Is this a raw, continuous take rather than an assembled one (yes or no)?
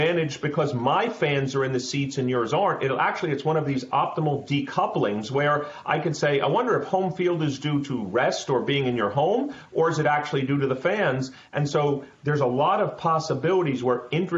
yes